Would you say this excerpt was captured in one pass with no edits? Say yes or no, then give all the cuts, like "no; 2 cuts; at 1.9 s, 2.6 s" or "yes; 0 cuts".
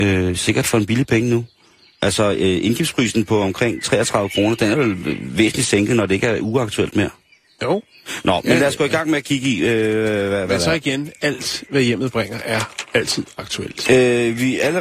no; 1 cut; at 13.8 s